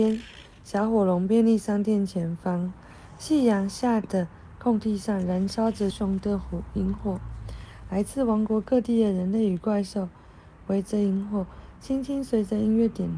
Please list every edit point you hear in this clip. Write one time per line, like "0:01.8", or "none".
0:05.9